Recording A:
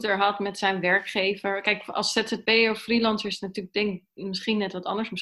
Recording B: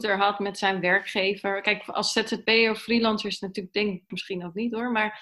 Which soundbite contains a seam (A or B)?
B